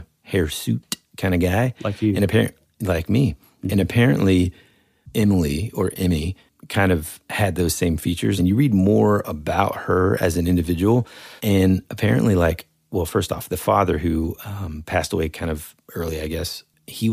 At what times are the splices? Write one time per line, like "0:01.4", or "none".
0:08.4
0:11.4

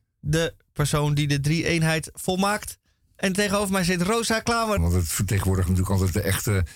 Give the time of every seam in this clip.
0:04.8

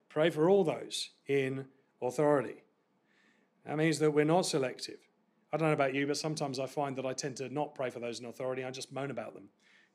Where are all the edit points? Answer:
none

